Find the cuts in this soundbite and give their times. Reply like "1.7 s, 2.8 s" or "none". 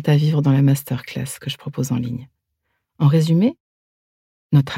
2.8 s